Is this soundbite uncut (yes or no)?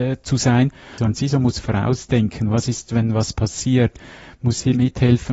no